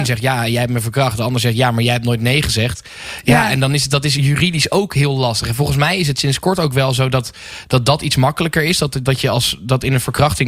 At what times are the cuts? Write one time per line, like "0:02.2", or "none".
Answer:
none